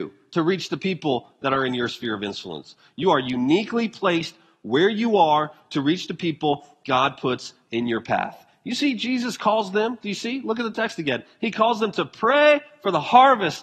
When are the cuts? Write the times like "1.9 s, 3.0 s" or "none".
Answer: none